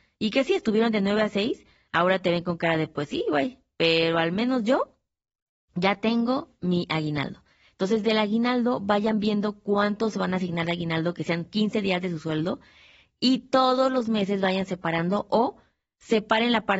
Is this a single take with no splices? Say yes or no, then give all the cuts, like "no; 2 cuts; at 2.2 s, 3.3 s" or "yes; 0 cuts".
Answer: yes; 0 cuts